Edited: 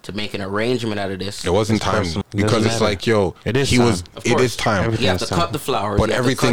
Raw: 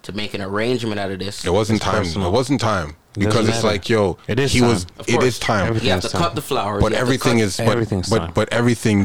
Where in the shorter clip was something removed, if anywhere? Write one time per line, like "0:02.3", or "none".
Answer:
0:02.2